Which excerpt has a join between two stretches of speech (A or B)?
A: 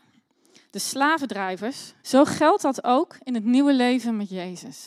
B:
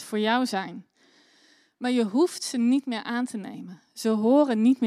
A